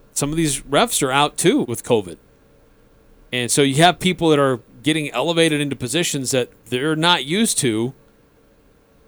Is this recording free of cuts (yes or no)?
no